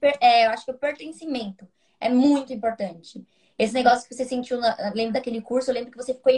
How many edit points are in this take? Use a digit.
0